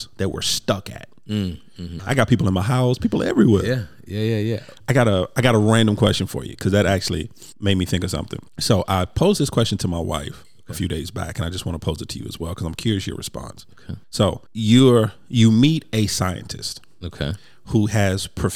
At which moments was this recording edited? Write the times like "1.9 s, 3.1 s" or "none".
2.0 s